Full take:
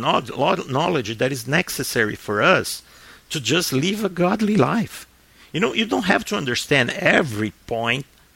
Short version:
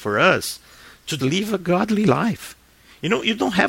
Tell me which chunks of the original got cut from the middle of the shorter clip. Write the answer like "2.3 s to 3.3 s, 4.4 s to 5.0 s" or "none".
3.4 s to 3.7 s